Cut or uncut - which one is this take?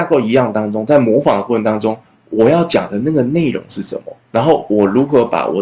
cut